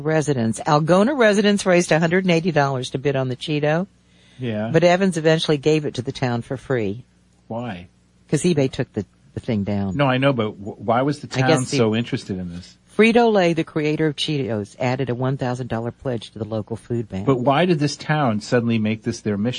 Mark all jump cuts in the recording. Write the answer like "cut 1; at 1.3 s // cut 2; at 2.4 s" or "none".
none